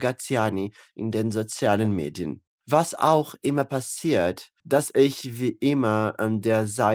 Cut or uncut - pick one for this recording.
cut